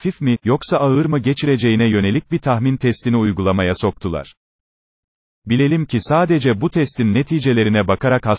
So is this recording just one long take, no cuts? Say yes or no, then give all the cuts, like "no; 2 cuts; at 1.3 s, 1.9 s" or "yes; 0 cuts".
yes; 0 cuts